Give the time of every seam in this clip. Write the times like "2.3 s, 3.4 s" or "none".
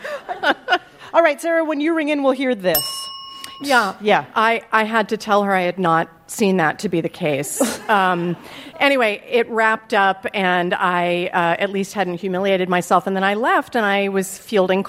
3.6 s